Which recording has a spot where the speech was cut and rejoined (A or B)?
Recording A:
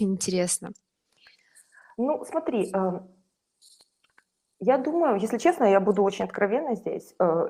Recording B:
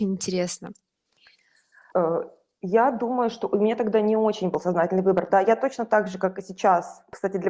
B